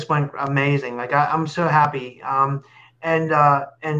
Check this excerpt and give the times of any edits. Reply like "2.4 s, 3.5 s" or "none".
none